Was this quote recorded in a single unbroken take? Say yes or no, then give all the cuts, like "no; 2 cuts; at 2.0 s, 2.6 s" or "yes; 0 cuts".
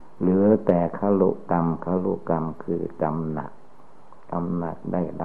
yes; 0 cuts